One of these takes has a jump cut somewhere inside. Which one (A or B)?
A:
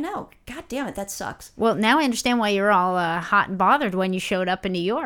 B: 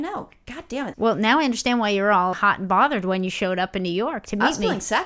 B